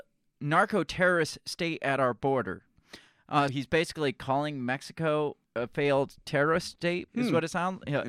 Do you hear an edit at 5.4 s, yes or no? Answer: yes